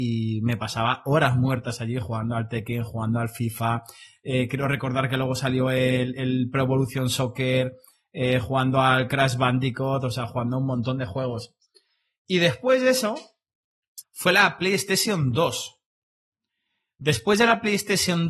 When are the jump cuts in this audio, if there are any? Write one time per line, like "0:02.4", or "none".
0:14.0